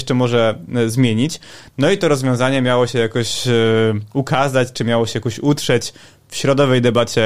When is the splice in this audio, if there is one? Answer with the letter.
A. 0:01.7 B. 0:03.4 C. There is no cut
A